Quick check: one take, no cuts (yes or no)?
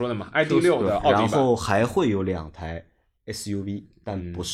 yes